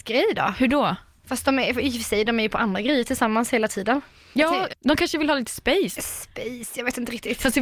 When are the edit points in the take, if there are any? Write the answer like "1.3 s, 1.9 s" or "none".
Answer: 4.7 s, 6.0 s